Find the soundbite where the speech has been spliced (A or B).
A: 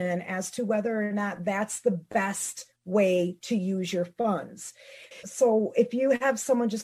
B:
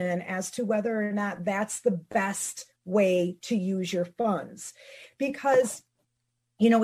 A